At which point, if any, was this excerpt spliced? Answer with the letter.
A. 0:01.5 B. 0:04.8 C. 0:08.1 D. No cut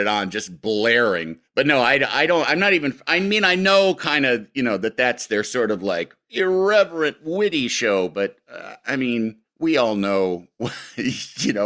D